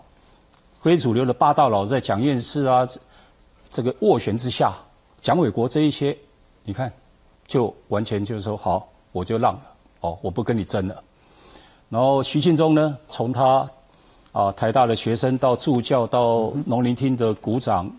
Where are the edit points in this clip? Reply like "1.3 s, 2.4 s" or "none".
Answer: 13.1 s